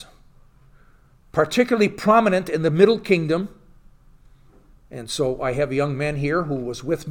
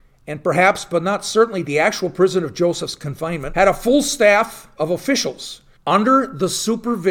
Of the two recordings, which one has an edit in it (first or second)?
second